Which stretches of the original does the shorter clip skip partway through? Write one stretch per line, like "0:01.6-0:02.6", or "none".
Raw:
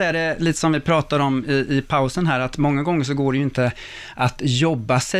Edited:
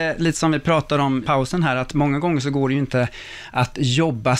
0:01.4-0:01.9